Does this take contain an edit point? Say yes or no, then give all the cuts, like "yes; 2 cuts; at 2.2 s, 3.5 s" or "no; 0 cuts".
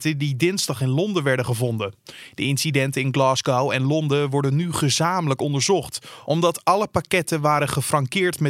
no; 0 cuts